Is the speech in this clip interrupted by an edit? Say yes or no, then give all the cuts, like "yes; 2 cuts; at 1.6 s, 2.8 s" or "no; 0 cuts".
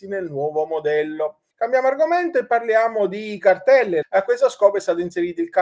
yes; 2 cuts; at 1.5 s, 4.0 s